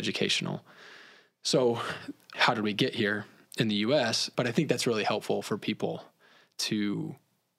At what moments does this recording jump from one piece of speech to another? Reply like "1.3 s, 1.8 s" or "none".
2.3 s, 4.3 s